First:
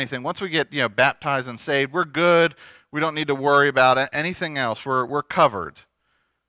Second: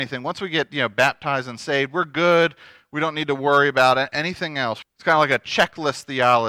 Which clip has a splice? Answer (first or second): second